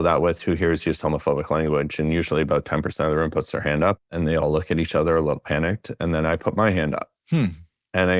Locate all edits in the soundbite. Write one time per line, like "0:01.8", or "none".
none